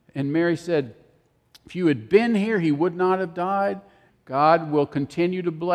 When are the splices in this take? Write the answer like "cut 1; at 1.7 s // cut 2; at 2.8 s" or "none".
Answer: cut 1; at 4.1 s